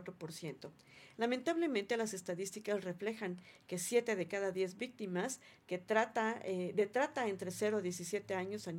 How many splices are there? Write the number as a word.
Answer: one